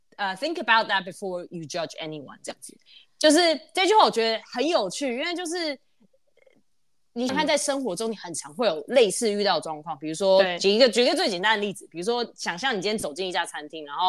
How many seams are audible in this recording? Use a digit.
1